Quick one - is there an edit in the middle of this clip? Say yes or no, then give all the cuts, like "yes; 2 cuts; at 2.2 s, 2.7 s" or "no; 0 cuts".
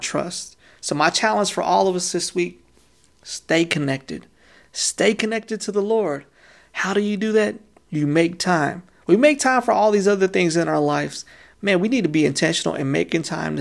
no; 0 cuts